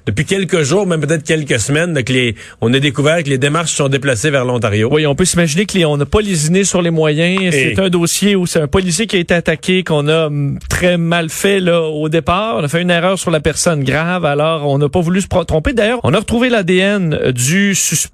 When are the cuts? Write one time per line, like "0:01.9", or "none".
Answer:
0:16.0